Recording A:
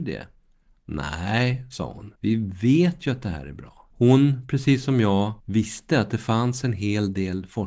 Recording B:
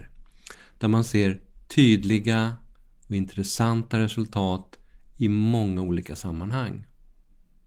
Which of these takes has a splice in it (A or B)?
A